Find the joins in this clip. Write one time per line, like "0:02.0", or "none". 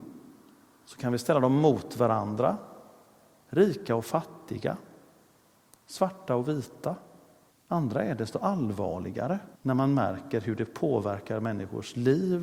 0:07.5
0:09.5